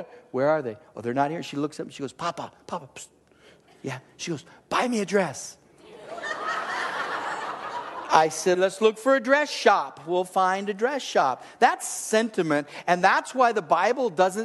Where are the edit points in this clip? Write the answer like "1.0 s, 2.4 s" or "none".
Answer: 8.5 s